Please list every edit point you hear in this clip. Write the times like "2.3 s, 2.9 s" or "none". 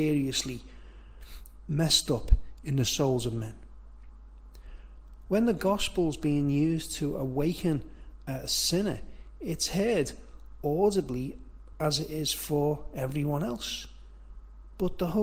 5.3 s